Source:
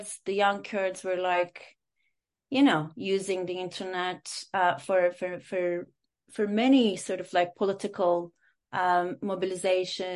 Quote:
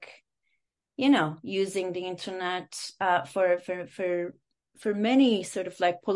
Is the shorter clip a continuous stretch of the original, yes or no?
yes